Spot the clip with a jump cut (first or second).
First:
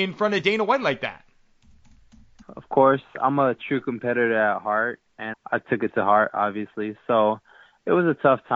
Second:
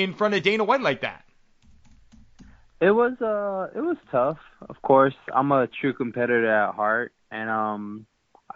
first